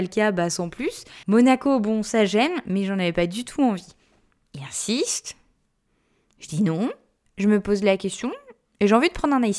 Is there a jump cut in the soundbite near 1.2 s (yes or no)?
yes